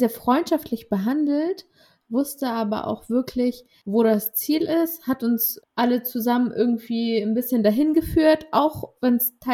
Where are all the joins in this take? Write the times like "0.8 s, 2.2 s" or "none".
5.6 s